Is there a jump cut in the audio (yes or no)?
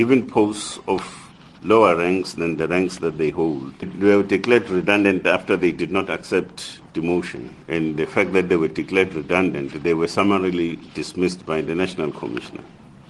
yes